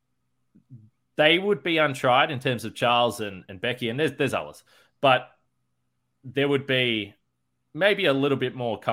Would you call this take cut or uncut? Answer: uncut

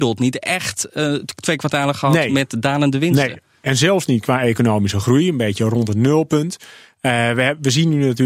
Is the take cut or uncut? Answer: uncut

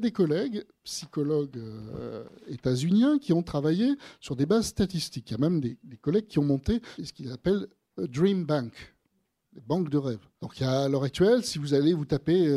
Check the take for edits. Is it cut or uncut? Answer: uncut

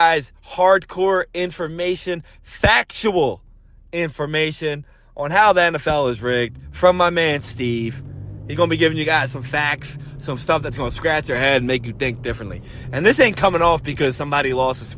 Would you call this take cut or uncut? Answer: uncut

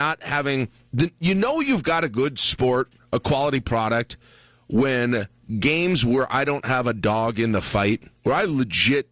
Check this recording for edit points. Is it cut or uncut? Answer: uncut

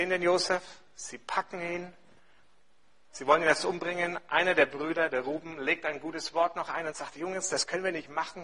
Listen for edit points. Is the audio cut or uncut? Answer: uncut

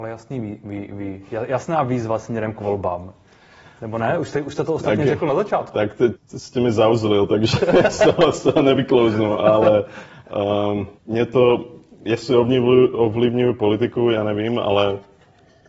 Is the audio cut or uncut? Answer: cut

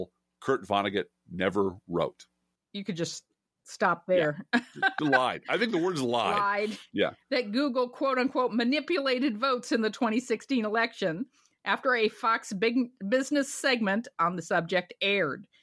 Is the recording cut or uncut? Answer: cut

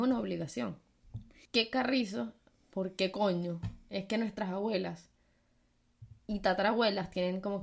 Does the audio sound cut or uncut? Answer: cut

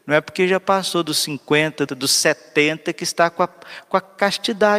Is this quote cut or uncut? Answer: cut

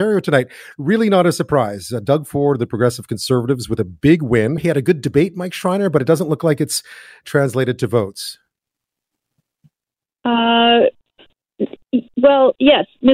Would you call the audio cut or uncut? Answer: cut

